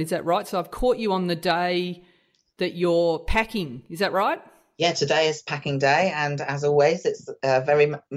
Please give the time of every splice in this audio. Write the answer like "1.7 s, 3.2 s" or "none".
none